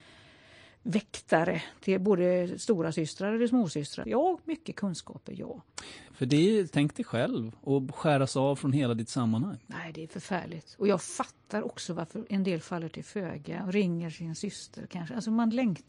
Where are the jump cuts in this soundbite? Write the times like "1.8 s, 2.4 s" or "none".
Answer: 4.0 s, 6.1 s